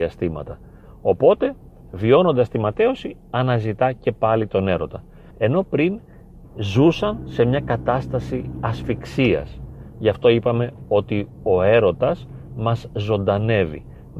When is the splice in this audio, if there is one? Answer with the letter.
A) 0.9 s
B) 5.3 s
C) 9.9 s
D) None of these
B